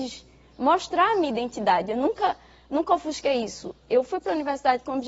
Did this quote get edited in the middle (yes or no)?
no